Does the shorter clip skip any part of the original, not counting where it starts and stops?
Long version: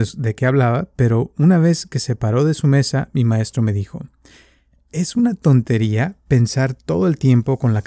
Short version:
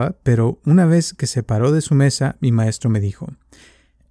no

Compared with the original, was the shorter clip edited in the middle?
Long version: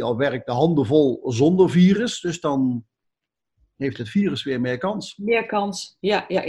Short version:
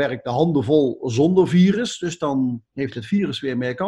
yes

